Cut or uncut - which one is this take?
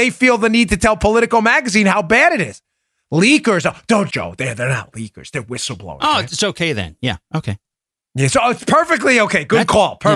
cut